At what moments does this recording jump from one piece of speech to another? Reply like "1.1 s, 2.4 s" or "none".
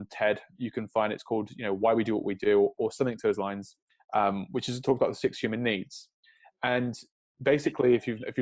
none